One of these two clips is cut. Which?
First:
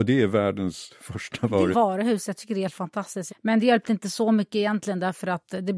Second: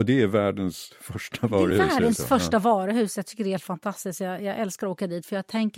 first; 2 cuts; at 1.7 s, 3.3 s

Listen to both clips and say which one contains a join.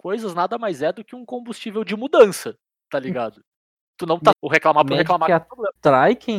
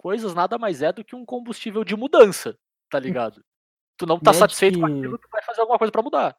first; 1 cut; at 4.3 s

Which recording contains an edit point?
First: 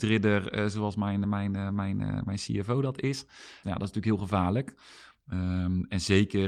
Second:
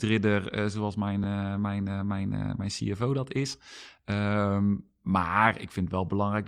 first; 2 cuts; at 1.2 s, 3.6 s

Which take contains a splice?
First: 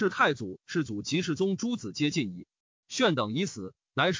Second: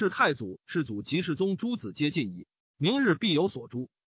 second; 1 cut; at 2.6 s

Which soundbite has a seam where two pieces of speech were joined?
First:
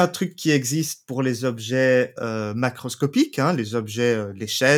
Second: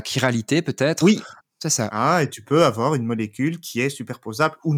second; 1 cut; at 1.4 s

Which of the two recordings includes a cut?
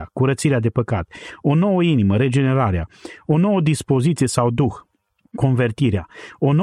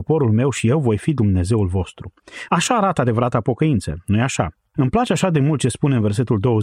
second; 2 cuts; at 2.5 s, 4.7 s

